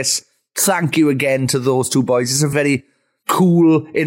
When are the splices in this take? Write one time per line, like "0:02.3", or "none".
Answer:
0:02.5